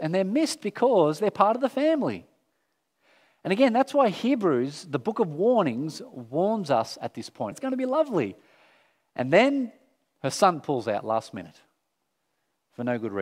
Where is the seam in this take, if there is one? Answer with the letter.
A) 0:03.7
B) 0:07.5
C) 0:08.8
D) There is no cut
B